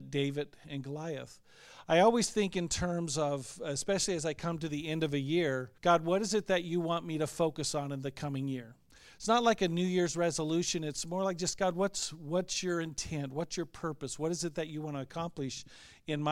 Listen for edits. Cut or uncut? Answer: cut